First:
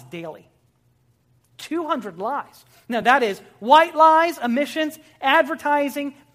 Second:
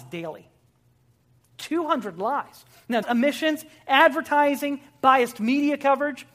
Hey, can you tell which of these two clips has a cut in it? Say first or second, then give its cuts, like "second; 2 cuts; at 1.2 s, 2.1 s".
second; 1 cut; at 3.0 s